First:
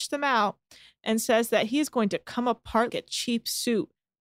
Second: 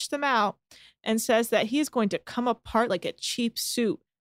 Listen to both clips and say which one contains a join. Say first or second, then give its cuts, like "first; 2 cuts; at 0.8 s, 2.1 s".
first; 1 cut; at 2.9 s